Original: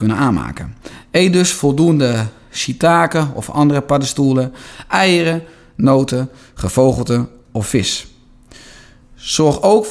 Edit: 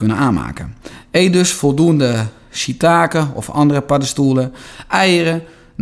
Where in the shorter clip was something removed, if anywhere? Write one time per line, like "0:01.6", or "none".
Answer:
none

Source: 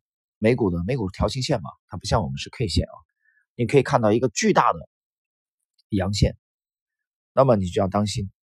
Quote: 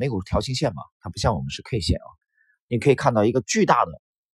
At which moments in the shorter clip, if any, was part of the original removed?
none

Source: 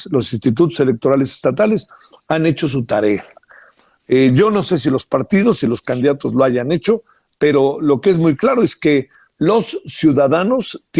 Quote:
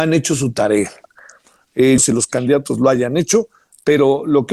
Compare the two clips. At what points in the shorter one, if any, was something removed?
0:02.0

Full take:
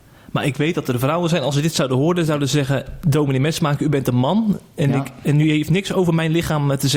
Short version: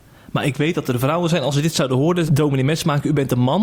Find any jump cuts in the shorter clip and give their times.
0:02.3

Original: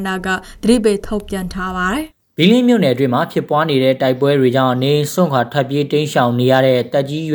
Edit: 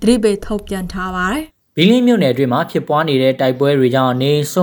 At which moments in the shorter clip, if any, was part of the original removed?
none

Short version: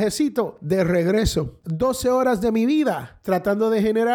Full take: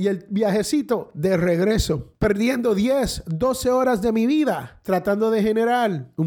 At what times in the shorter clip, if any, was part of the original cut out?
0:01.6

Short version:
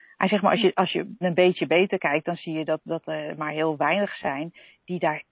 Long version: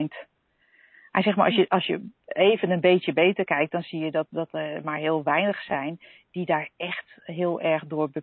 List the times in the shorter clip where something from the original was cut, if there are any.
0:01.2

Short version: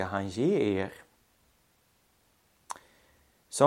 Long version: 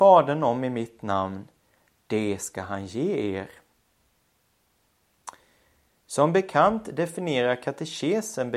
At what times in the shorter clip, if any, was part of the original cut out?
none

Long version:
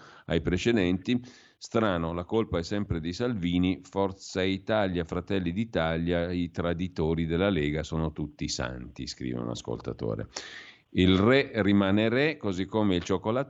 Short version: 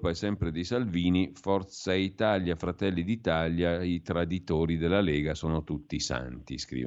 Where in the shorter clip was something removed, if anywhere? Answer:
none

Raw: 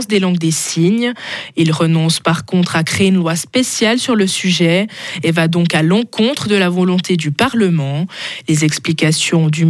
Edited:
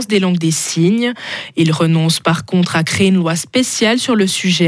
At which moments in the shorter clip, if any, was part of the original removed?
none

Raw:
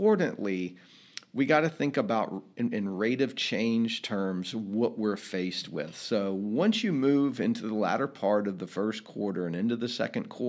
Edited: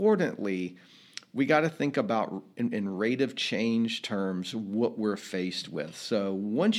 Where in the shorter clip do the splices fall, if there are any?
none

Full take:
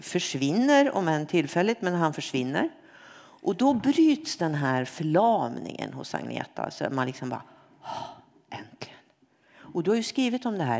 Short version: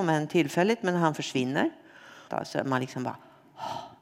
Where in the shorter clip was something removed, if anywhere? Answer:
0:02.3

